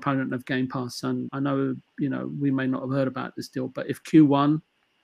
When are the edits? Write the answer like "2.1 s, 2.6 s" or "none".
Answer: 1.3 s